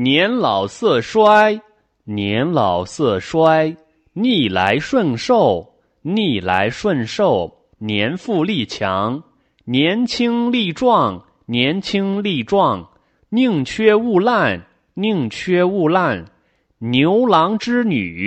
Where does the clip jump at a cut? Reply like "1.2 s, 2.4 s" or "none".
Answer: 7.7 s